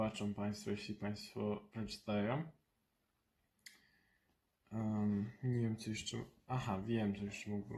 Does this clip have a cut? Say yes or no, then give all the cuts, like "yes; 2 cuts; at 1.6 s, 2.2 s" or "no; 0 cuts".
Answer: no; 0 cuts